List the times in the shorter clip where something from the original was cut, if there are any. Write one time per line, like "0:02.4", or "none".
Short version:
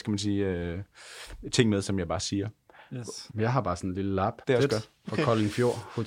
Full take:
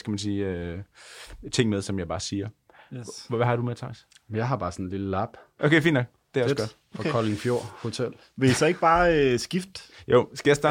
0:03.3
0:04.4